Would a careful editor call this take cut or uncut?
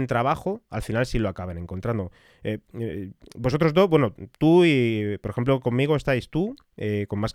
uncut